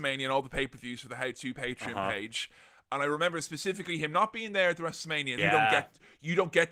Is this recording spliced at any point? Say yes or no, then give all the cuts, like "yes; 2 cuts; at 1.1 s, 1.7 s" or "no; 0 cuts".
yes; 1 cut; at 5.4 s